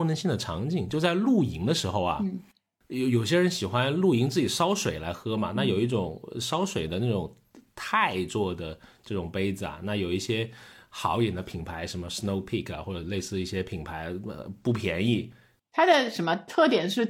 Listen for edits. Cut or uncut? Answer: uncut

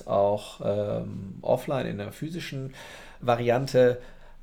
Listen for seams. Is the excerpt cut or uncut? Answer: cut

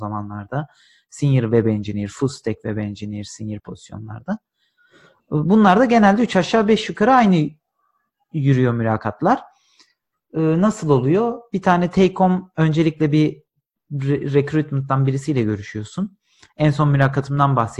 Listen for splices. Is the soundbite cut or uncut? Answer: uncut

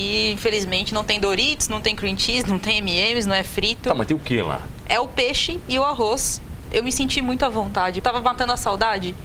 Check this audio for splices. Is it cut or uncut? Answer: cut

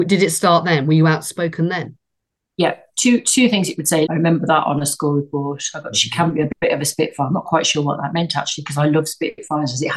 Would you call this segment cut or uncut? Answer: cut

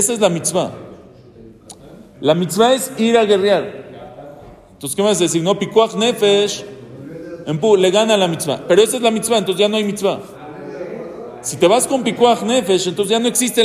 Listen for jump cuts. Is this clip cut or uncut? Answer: uncut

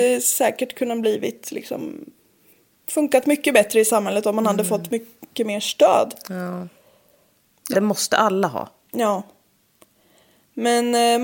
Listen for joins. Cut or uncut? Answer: cut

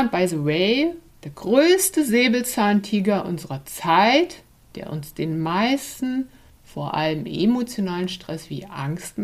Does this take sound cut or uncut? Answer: uncut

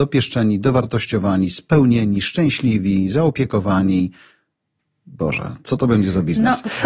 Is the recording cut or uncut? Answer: uncut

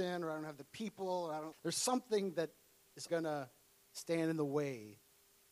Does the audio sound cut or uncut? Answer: cut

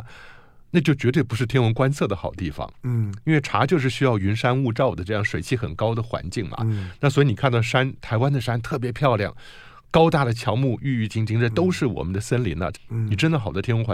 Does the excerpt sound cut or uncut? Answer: cut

